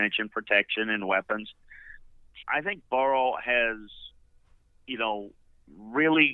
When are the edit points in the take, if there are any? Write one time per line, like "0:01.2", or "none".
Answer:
0:02.4